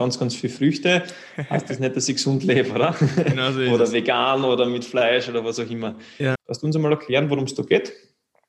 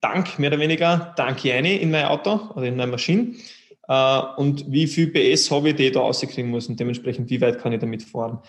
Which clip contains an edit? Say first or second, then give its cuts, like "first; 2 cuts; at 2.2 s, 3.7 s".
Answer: first; 1 cut; at 6.4 s